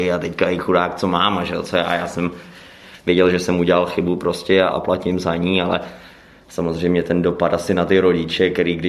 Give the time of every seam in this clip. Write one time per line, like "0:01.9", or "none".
0:04.7